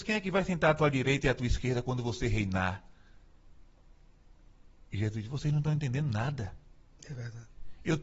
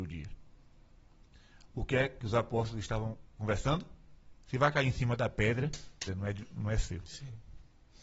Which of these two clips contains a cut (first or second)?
second